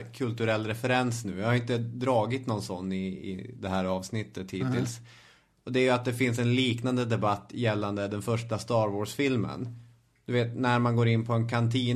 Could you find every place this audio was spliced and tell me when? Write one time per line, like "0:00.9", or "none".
none